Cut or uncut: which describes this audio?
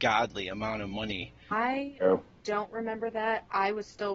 cut